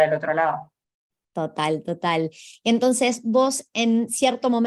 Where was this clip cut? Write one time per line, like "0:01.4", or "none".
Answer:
none